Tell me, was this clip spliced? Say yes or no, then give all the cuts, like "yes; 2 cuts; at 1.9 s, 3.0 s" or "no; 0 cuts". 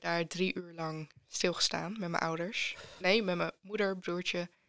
no; 0 cuts